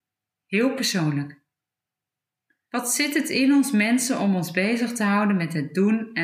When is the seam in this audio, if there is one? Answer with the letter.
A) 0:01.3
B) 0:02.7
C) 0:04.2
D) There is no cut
B